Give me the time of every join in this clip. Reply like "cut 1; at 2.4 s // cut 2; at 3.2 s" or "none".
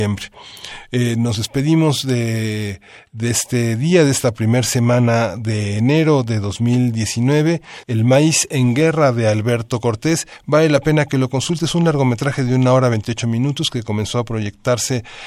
cut 1; at 7.8 s